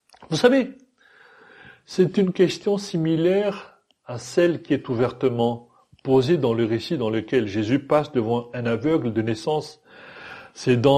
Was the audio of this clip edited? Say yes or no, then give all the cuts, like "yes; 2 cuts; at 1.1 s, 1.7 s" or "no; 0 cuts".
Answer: no; 0 cuts